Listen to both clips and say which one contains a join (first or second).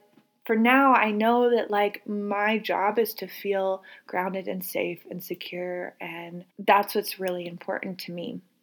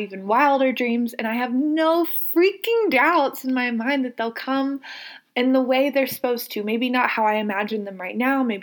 first